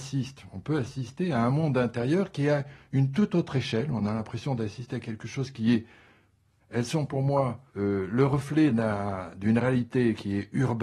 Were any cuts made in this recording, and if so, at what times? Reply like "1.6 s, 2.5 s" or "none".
6.6 s, 7.7 s